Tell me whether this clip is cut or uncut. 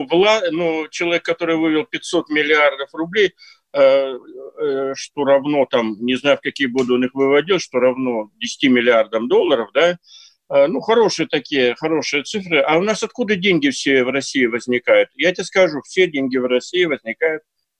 uncut